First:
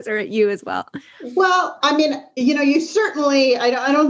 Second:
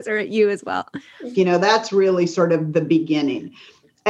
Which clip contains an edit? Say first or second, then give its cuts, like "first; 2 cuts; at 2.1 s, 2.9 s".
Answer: second; 1 cut; at 1.3 s